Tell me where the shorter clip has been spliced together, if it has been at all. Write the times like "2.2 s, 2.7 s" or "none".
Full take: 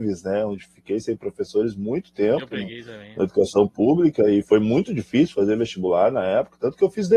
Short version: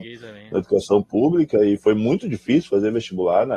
none